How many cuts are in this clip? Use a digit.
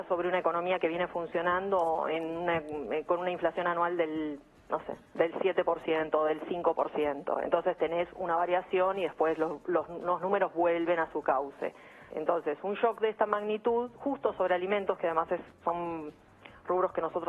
1